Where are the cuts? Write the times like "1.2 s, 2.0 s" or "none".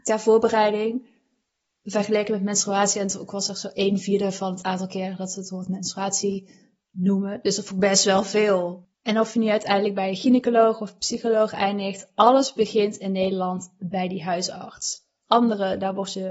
8.9 s, 15.2 s